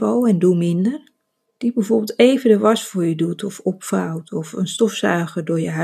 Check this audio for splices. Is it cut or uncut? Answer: cut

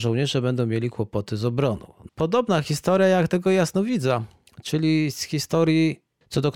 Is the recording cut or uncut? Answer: cut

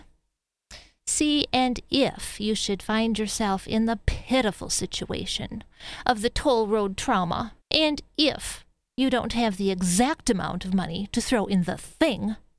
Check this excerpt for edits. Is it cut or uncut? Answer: cut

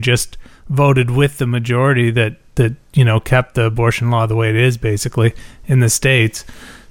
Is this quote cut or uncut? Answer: uncut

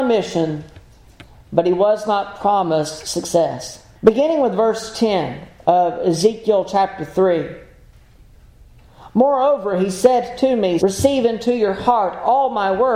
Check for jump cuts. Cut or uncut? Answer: cut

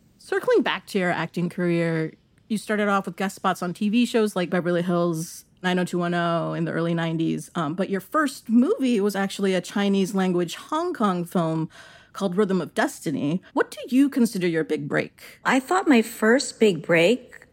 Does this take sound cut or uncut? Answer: cut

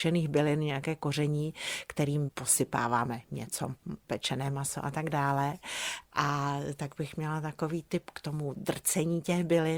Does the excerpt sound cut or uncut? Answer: uncut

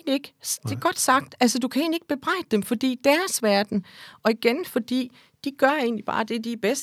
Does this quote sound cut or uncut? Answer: uncut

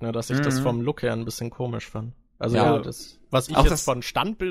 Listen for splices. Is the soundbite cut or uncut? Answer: uncut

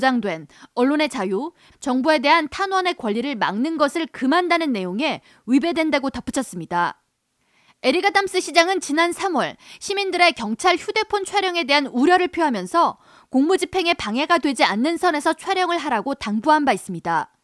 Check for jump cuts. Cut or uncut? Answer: cut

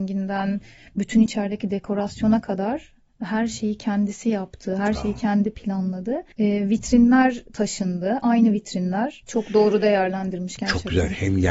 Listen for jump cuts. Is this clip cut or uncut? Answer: cut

